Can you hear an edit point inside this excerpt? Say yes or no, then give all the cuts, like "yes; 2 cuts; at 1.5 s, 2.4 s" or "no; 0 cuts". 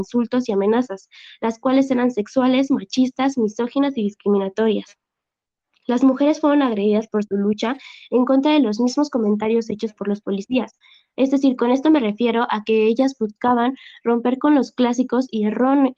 no; 0 cuts